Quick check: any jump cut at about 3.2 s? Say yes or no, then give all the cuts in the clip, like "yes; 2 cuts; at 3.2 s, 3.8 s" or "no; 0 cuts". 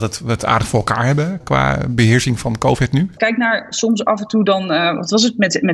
yes; 2 cuts; at 1.4 s, 3.2 s